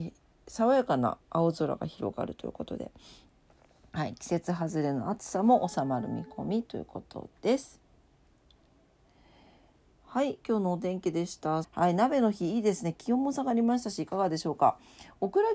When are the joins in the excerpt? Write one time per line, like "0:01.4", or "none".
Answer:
0:11.6